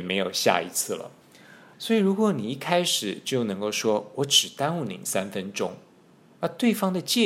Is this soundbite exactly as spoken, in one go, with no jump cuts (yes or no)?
no